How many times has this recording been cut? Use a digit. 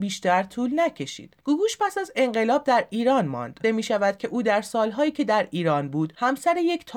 1